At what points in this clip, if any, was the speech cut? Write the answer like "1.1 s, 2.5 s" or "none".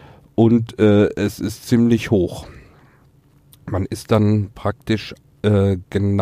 none